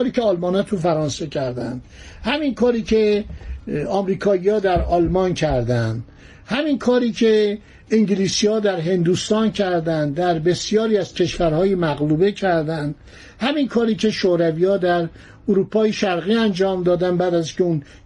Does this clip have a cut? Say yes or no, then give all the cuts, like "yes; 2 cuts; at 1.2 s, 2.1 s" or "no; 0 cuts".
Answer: no; 0 cuts